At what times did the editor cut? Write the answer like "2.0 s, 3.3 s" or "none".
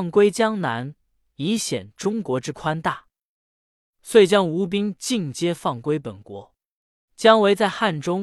3.5 s, 7.1 s